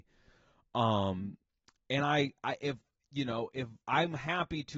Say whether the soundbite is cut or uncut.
cut